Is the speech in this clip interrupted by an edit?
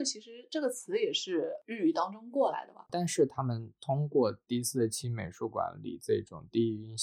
yes; 1 cut; at 2.9 s

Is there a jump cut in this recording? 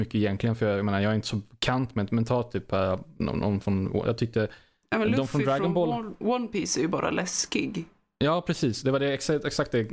no; 0 cuts

